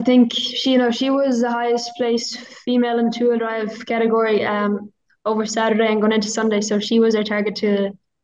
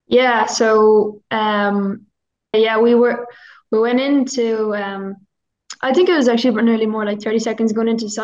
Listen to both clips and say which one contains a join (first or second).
second